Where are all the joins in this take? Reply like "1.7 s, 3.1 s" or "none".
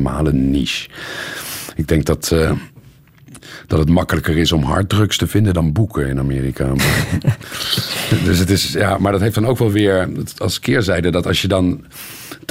none